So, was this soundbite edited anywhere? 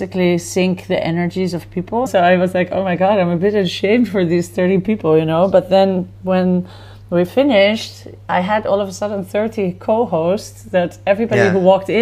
yes; 1 cut; at 2.1 s

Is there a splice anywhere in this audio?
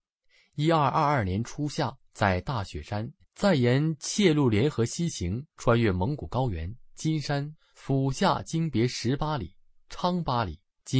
yes; 1 cut; at 3.2 s

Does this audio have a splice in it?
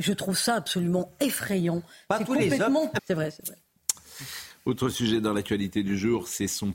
yes; 1 cut; at 3.0 s

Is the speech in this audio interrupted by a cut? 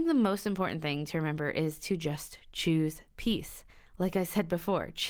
no; 0 cuts

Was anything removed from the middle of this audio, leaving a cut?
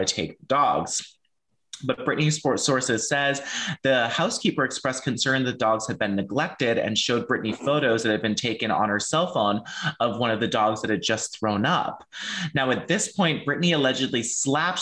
no; 0 cuts

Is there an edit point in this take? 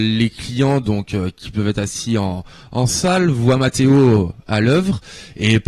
no; 0 cuts

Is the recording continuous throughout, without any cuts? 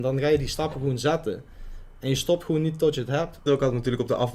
no; 1 cut; at 3.5 s

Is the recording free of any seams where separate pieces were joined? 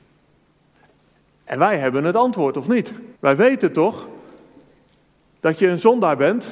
no; 1 cut; at 3.2 s

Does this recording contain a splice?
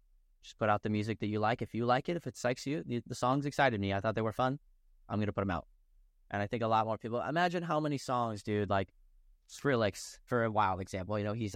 yes; 1 cut; at 10.3 s

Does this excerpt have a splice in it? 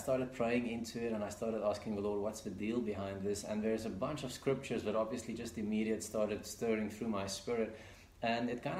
no; 0 cuts

